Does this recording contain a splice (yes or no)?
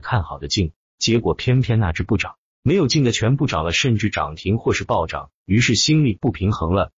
no